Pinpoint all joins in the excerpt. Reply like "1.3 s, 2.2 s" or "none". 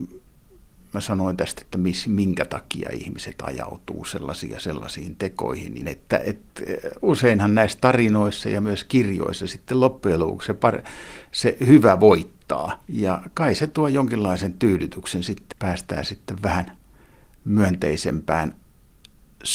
5.8 s, 12.8 s, 15.5 s